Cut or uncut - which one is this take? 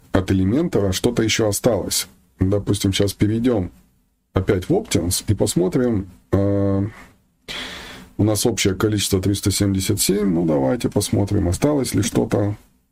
uncut